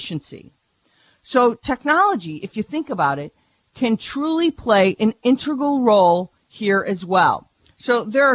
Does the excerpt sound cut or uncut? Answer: uncut